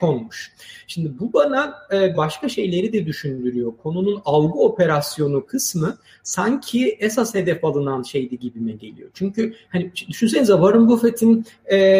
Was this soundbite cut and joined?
yes; 1 cut; at 2.1 s

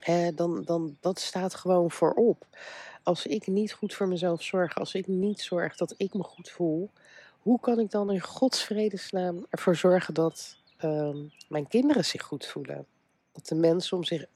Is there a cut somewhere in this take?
no; 0 cuts

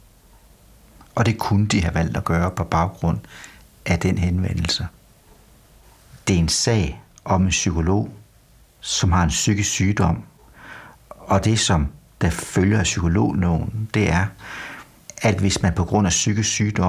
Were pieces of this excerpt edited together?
no; 0 cuts

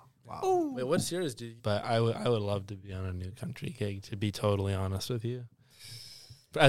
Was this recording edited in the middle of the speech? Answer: yes; 1 cut; at 1.6 s

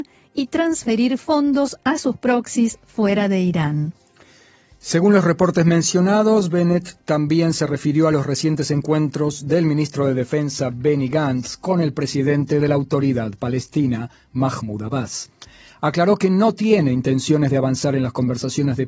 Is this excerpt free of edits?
yes; 0 cuts

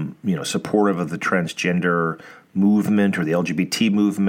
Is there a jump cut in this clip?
no; 0 cuts

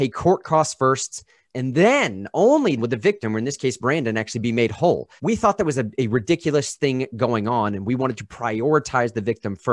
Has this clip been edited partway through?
yes; 3 cuts; at 1.4 s, 2.8 s, 5.2 s

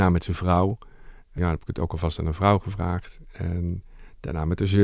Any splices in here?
yes; 1 cut; at 1.4 s

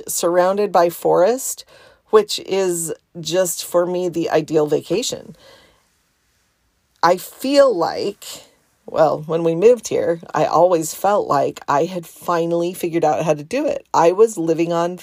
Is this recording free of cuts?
yes; 0 cuts

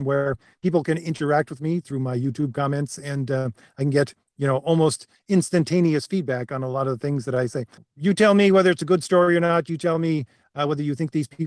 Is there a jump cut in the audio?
yes; 1 cut; at 7.8 s

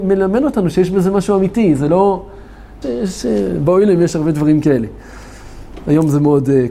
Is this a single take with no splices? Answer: no; 1 cut; at 2.8 s

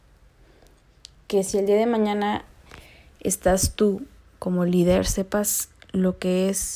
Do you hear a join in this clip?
no; 0 cuts

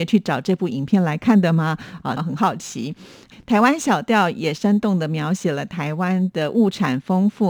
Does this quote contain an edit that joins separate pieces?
yes; 2 cuts; at 2.2 s, 3.3 s

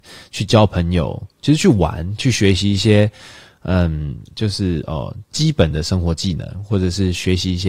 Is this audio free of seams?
yes; 0 cuts

